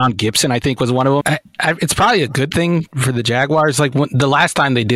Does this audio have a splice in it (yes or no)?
yes